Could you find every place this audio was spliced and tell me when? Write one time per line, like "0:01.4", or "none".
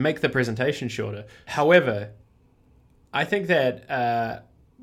0:01.5